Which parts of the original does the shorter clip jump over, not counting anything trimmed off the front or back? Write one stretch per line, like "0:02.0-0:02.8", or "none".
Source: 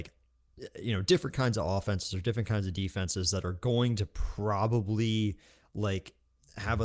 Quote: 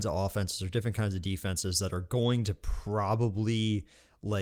none